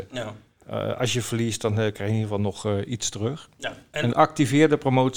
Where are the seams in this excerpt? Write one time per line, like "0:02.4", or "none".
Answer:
0:04.1